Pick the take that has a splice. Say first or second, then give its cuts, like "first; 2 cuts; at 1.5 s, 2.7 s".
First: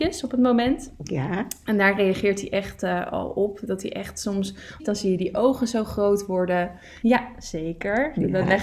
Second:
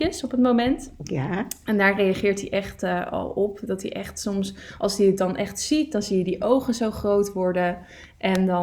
first; 2 cuts; at 4.8 s, 7.0 s